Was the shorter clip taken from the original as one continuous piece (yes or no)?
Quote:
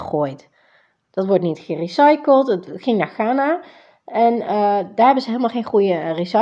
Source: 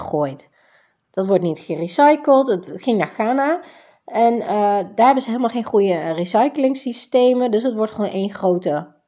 yes